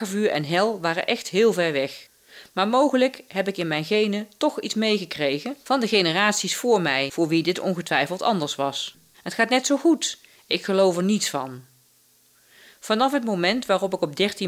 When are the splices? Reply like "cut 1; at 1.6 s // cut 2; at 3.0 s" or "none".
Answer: cut 1; at 9.1 s